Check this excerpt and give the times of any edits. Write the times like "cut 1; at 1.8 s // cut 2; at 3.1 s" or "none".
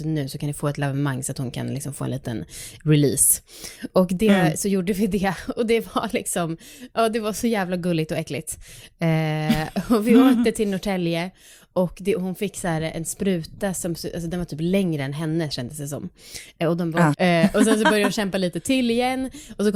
cut 1; at 17.1 s